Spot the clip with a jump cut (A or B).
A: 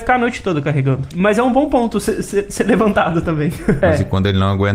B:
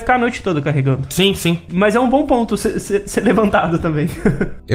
A